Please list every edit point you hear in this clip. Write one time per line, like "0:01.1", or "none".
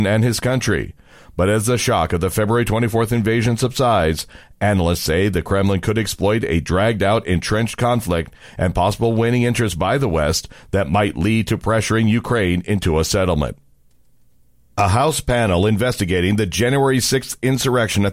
none